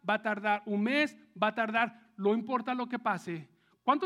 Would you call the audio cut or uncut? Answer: uncut